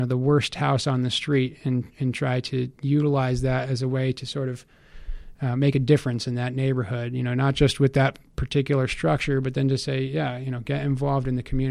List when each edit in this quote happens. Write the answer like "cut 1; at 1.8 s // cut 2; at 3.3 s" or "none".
none